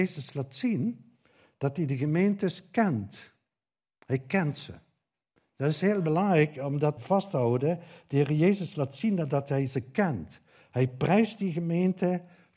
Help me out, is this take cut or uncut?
cut